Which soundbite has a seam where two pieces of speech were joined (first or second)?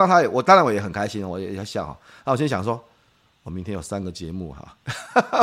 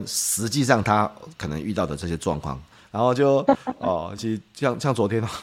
second